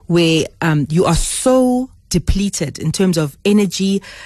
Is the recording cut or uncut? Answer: cut